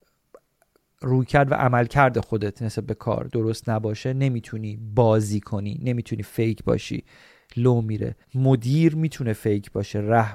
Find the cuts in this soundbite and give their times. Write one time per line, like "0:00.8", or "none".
0:08.2